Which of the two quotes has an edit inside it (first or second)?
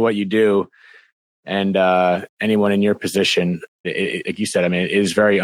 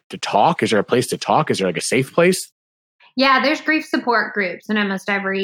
first